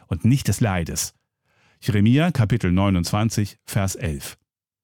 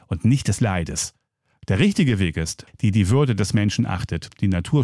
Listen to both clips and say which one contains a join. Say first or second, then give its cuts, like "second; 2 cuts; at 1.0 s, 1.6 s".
second; 2 cuts; at 1.5 s, 2.7 s